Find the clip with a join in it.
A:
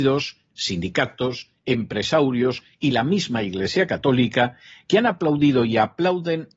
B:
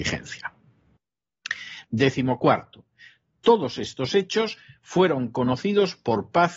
B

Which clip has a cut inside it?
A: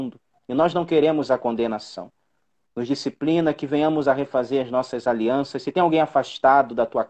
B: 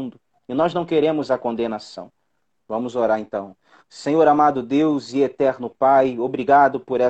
B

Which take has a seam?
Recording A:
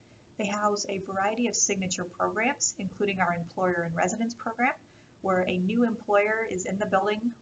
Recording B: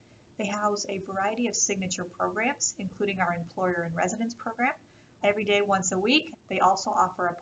B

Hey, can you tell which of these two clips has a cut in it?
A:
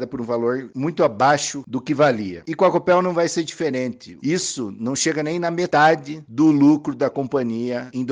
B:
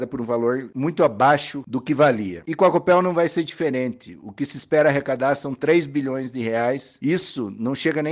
A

